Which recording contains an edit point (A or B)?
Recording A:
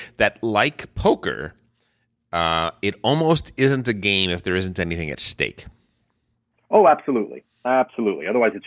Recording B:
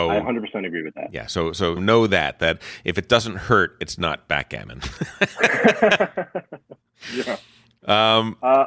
B